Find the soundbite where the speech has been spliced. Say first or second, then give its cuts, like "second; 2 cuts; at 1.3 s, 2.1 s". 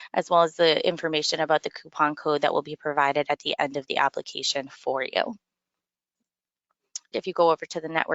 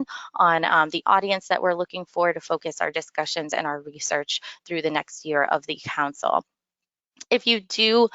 first; 1 cut; at 7.1 s